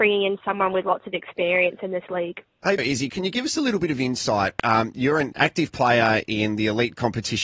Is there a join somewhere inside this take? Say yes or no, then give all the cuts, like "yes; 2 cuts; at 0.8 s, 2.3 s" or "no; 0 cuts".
yes; 1 cut; at 2.8 s